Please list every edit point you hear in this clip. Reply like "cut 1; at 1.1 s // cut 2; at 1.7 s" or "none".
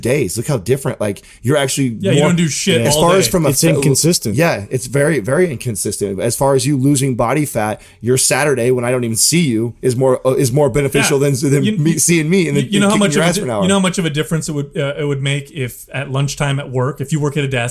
none